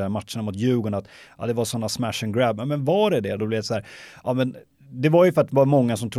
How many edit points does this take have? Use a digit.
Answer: 1